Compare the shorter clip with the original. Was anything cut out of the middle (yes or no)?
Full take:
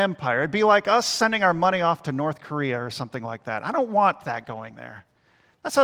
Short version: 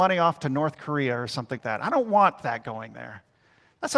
yes